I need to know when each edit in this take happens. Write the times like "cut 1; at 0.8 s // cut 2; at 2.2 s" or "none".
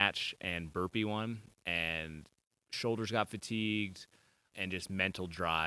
cut 1; at 4.5 s